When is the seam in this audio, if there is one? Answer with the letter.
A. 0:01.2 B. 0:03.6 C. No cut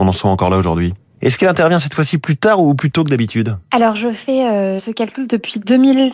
A